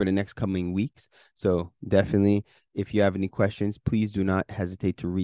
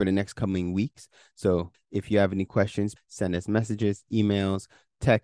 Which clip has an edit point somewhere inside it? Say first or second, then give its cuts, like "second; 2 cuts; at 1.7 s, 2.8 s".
second; 2 cuts; at 1.7 s, 3.0 s